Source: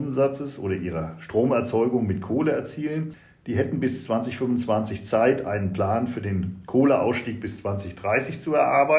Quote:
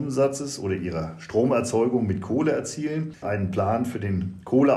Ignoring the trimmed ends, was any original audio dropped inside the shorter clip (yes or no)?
yes